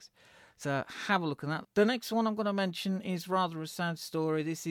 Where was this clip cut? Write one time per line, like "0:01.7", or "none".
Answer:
0:01.6